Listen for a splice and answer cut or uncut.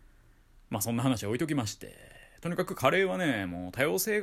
uncut